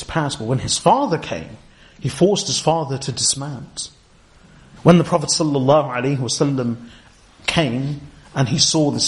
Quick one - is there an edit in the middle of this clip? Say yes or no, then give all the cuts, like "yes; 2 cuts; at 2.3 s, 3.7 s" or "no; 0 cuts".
yes; 1 cut; at 4.8 s